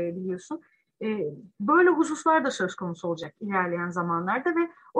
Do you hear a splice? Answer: no; 0 cuts

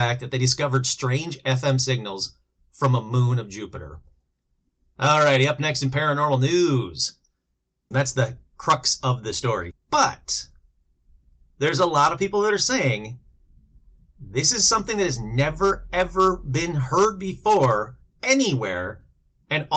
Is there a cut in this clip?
yes; 2 cuts; at 7.9 s, 9.7 s

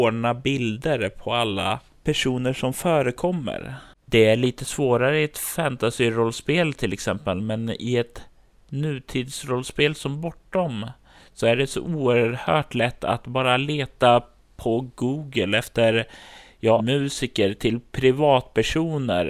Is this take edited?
yes; 1 cut; at 16.8 s

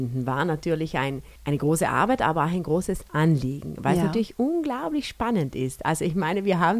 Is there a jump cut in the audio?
yes; 1 cut; at 1.4 s

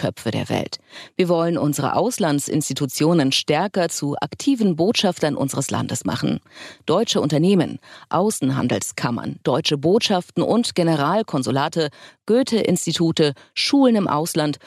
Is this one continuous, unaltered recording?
yes; 0 cuts

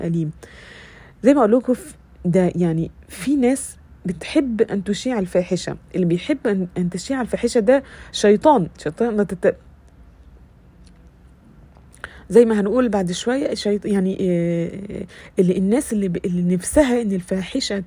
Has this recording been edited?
no; 0 cuts

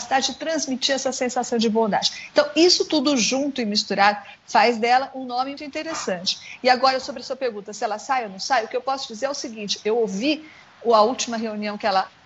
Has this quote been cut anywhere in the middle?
yes; 1 cut; at 5.6 s

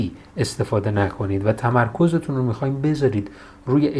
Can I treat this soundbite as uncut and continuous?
yes; 0 cuts

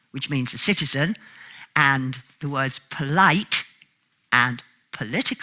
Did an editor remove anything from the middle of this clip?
no; 0 cuts

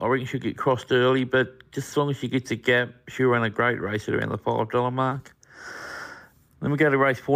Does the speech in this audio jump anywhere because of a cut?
no; 0 cuts

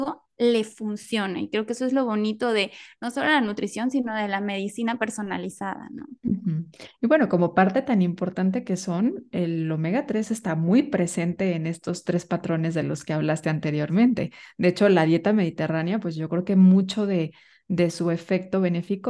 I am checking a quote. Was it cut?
no; 0 cuts

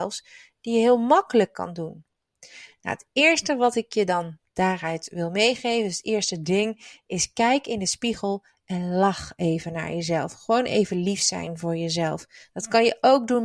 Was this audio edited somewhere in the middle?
no; 0 cuts

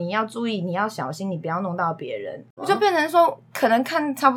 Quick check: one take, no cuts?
no; 1 cut; at 2.6 s

